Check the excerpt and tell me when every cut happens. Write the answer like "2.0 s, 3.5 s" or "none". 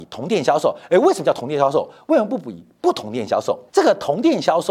3.7 s